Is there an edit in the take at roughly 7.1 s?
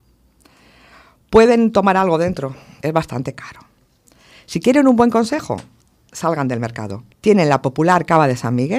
yes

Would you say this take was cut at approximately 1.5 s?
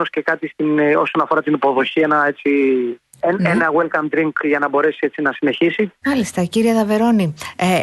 no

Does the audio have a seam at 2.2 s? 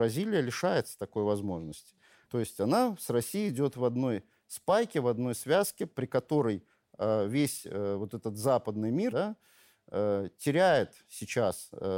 yes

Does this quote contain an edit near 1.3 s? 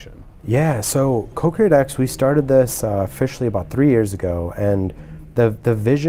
yes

